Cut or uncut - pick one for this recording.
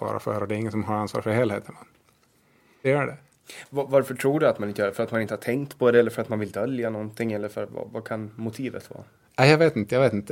cut